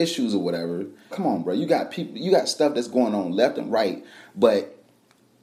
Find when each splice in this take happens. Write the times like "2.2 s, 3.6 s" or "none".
1.1 s